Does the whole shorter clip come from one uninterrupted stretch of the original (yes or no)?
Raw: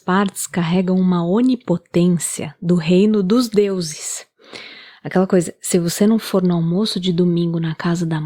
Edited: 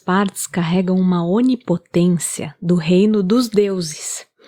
yes